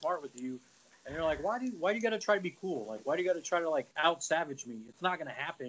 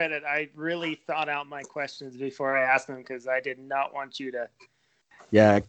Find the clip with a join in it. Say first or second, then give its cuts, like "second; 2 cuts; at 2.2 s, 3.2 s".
first; 1 cut; at 3.9 s